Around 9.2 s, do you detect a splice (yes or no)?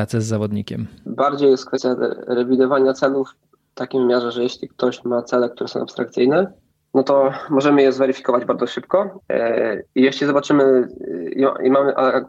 yes